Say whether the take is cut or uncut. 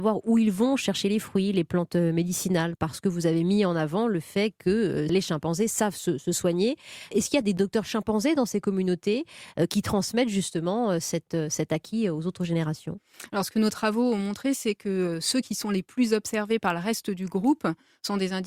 cut